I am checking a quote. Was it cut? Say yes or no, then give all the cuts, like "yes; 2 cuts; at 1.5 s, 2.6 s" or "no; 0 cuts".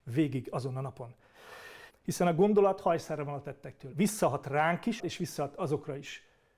yes; 3 cuts; at 1.9 s, 3.9 s, 5.0 s